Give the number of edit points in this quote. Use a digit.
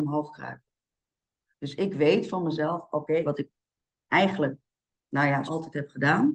2